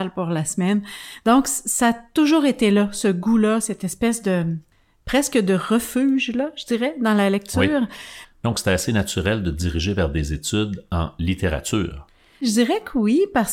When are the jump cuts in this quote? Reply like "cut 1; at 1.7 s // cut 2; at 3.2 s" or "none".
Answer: none